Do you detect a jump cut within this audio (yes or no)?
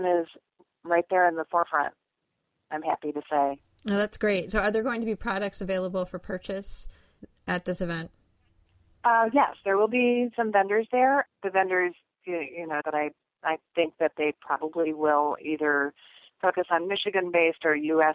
yes